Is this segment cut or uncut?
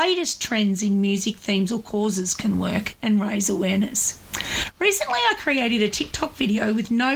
uncut